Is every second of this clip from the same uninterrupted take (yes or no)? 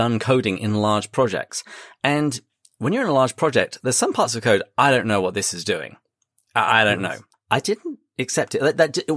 no